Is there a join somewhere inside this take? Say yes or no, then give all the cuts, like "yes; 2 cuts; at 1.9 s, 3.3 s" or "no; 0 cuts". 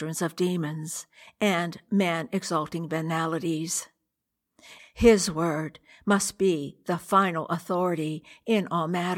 yes; 1 cut; at 4.8 s